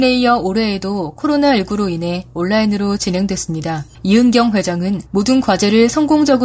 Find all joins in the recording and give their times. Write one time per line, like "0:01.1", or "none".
0:03.9
0:05.1